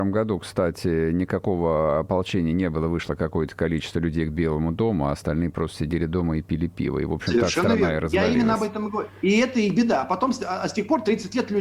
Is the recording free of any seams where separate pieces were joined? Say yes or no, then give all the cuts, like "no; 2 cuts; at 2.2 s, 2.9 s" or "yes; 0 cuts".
yes; 0 cuts